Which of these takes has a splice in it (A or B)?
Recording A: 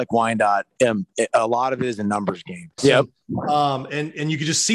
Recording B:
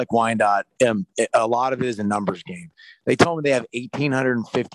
A